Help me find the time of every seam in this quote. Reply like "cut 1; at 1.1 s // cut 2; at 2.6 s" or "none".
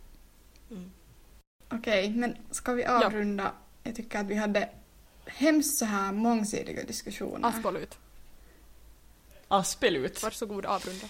none